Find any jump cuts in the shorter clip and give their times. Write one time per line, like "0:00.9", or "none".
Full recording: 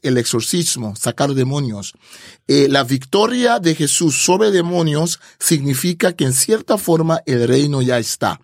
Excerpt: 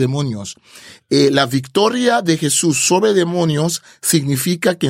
none